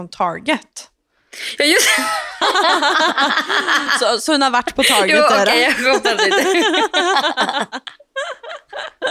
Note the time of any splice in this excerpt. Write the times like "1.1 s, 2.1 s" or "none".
none